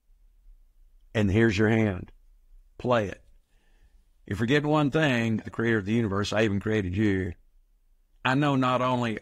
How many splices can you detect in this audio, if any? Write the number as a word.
one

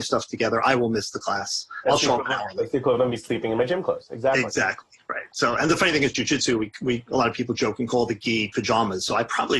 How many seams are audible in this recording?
zero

